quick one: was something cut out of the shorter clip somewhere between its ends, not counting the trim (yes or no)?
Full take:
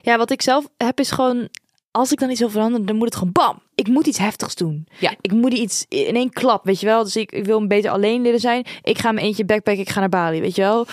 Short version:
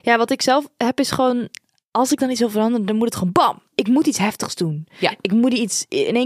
no